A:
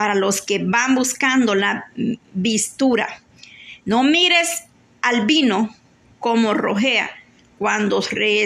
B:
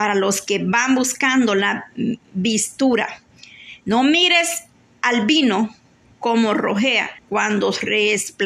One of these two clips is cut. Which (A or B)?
B